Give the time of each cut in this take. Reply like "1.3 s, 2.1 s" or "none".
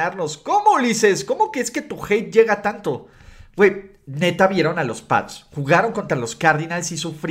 none